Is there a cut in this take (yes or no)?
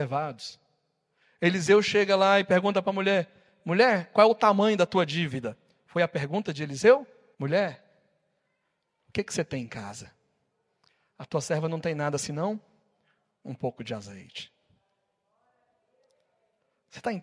yes